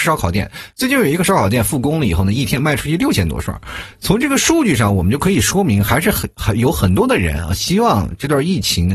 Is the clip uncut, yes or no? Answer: yes